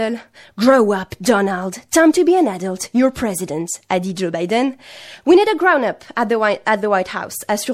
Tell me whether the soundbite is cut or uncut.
uncut